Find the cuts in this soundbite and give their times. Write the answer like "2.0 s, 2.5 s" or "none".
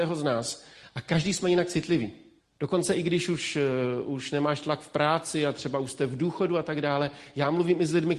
2.4 s